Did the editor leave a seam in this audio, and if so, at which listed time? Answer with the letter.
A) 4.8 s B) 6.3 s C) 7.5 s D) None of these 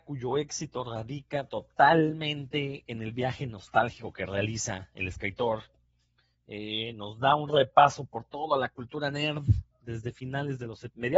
D